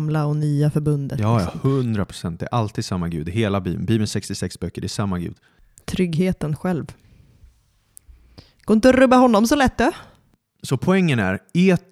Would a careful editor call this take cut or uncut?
uncut